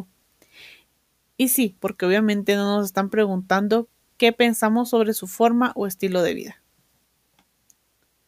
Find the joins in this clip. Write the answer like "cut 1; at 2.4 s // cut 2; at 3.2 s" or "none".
cut 1; at 1.8 s